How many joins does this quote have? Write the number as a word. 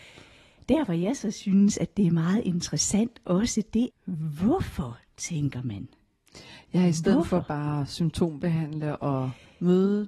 one